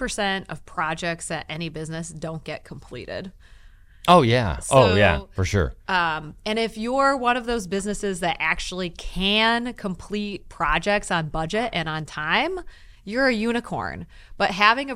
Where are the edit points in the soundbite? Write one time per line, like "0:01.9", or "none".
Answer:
none

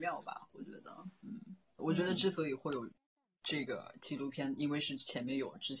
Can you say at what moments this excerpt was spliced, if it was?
0:01.8

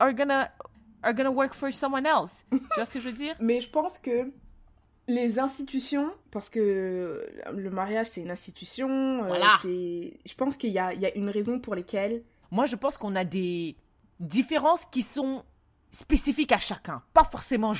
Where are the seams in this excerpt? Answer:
0:06.2
0:12.4

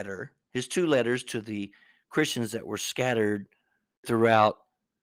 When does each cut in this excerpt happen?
none

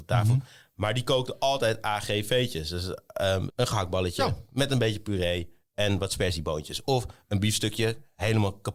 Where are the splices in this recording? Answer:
0:03.5

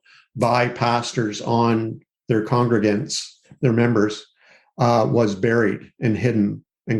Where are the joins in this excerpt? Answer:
none

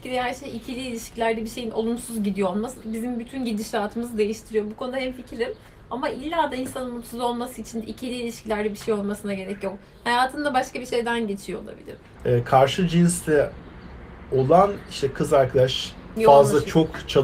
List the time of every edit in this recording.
0:12.2
0:16.2

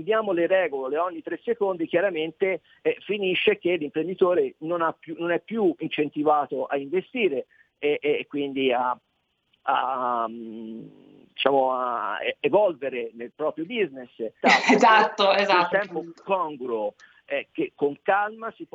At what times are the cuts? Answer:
0:14.4
0:15.7

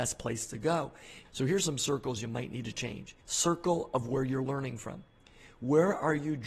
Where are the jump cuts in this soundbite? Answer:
0:01.3
0:03.2

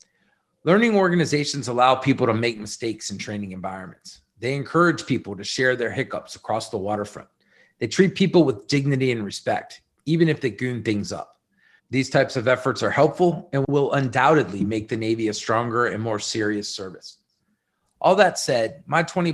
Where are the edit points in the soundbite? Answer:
0:11.8

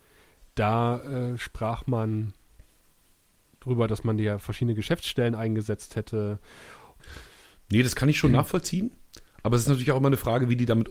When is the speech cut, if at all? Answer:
0:07.0

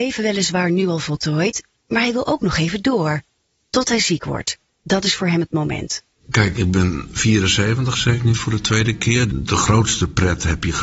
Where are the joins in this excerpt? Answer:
0:09.3

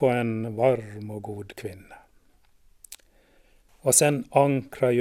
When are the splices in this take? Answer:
0:03.7

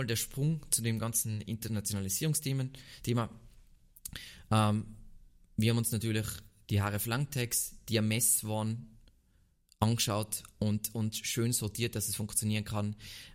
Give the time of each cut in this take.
none

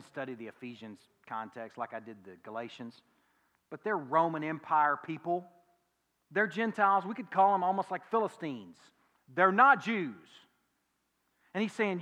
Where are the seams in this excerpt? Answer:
none

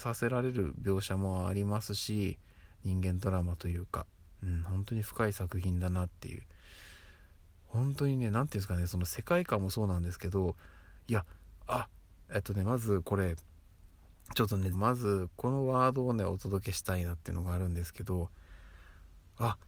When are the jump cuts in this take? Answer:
0:14.7

